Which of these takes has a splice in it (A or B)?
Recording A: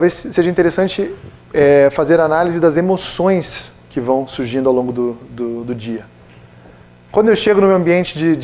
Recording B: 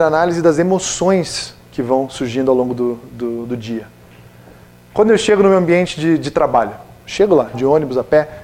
B